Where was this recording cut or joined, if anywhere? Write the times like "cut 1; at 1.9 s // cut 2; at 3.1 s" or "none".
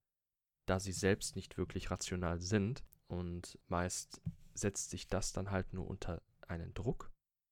none